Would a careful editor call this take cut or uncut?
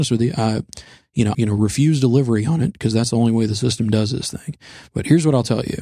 cut